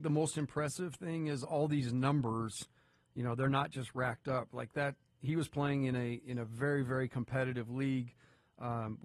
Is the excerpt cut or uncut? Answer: uncut